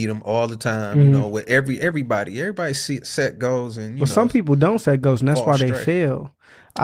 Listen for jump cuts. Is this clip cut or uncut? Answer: uncut